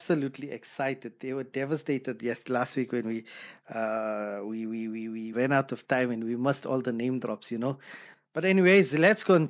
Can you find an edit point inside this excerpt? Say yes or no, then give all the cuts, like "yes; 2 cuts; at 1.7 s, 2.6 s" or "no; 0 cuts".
yes; 2 cuts; at 5.3 s, 8.1 s